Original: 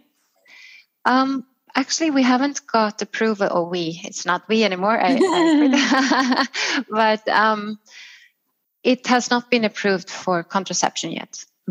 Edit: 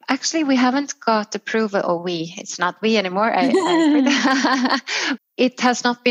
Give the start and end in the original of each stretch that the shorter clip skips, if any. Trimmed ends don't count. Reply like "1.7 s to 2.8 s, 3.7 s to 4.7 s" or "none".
6.8 s to 8.6 s